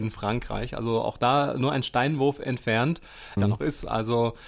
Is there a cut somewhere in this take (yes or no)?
yes